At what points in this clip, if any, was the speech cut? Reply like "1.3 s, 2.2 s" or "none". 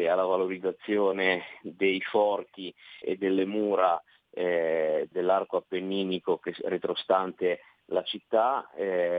3.0 s, 5.1 s